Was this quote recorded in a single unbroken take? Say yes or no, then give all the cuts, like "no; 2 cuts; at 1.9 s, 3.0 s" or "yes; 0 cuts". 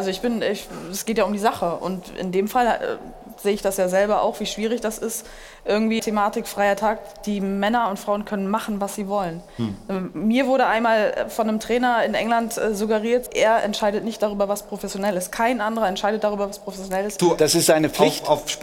no; 3 cuts; at 6.0 s, 13.3 s, 17.2 s